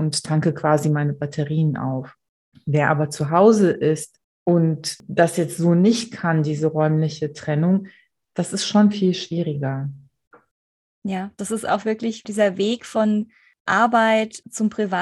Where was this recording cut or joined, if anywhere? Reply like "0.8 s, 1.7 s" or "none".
8.9 s